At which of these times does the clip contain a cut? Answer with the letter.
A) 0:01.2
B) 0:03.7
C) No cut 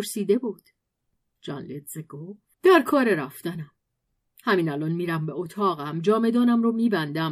C